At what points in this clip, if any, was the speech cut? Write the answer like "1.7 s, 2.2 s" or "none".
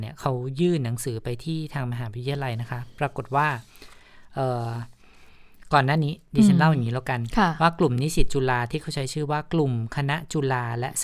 none